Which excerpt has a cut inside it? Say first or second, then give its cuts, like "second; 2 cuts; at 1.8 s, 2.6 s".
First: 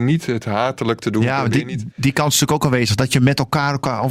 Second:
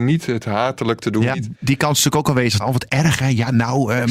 second; 2 cuts; at 1.3 s, 2.6 s